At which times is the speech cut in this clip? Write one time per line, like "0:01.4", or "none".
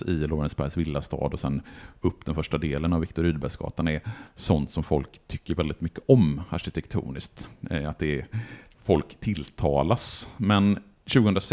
none